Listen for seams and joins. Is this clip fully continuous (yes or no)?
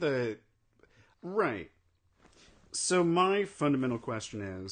no